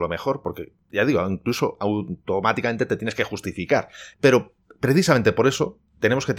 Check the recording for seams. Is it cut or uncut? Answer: cut